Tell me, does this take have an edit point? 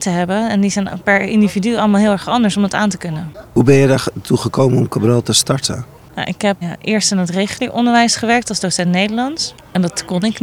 yes; 1 cut; at 6.6 s

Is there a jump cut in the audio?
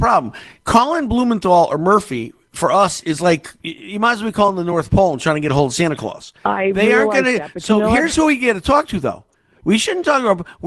no; 0 cuts

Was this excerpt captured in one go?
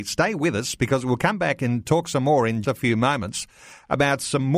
no; 1 cut; at 2.6 s

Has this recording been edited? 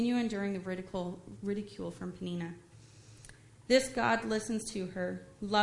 no; 0 cuts

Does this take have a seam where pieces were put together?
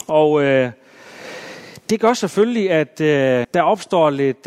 yes; 1 cut; at 3.4 s

